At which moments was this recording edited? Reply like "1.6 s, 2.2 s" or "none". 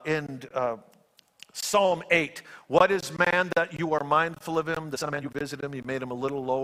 none